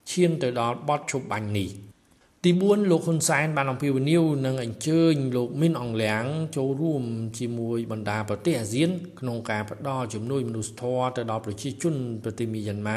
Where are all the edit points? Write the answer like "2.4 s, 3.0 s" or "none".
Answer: none